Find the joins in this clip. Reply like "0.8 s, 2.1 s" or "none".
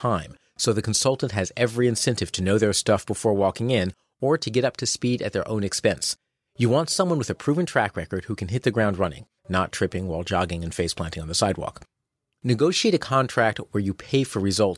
6.5 s, 9.4 s